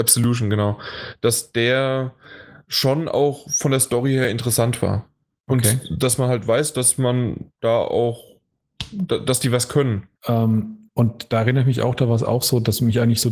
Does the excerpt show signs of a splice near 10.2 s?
yes; 1 cut; at 10.2 s

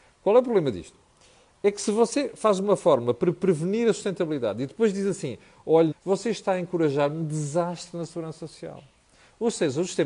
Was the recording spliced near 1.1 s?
no; 1 cut; at 5.9 s

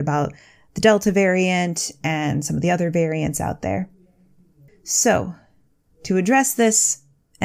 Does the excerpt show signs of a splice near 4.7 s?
yes; 1 cut; at 4.7 s

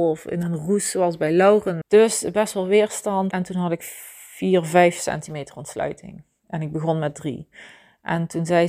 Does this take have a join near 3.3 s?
yes; 2 cuts; at 1.8 s, 3.3 s

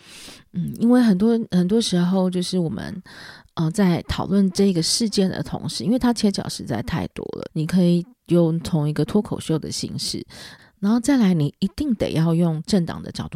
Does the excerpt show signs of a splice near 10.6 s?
yes; 2 cuts; at 7.5 s, 10.6 s

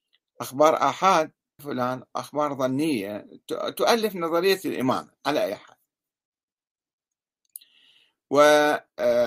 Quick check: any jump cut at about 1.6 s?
yes; 1 cut; at 1.6 s

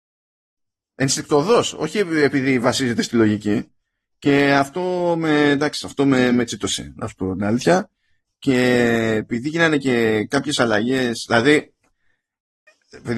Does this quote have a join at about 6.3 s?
no; 0 cuts

